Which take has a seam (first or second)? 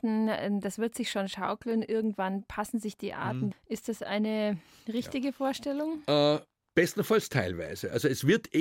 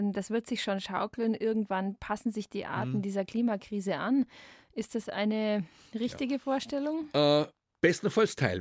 first